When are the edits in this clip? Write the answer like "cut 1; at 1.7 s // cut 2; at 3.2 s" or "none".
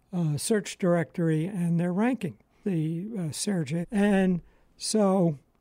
cut 1; at 2.6 s // cut 2; at 3.8 s